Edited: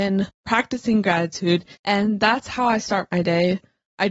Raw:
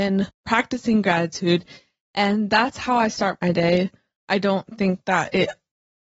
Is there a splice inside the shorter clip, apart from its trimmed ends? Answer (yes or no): yes